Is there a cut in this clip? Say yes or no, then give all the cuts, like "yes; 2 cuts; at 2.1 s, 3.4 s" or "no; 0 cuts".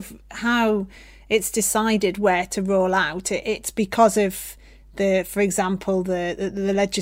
no; 0 cuts